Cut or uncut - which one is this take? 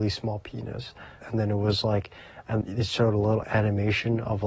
cut